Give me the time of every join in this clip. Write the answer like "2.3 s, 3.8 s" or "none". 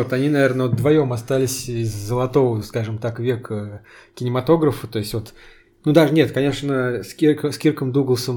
none